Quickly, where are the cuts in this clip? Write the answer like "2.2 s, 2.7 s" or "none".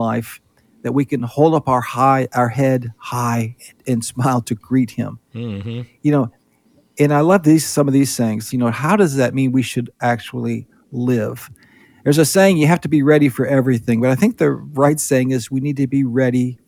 8.5 s